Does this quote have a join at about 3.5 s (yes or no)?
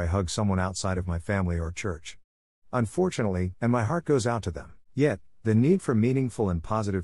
yes